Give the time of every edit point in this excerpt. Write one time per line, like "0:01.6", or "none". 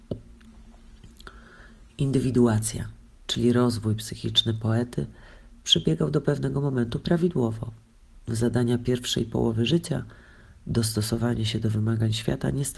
none